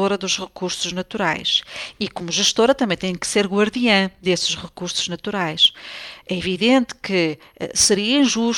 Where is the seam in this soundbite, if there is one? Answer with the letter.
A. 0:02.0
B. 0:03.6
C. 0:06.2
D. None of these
D